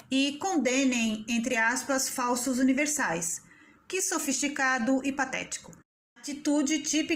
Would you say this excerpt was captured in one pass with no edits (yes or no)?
yes